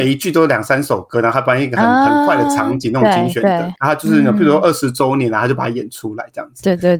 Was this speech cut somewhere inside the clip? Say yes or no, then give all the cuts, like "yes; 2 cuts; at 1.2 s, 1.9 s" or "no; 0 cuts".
no; 0 cuts